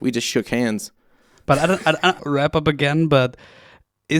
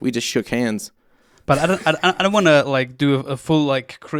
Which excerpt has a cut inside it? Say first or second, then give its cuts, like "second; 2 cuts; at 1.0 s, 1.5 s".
first; 1 cut; at 2.2 s